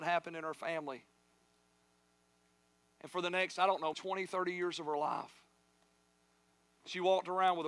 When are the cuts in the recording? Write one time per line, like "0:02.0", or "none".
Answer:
0:03.9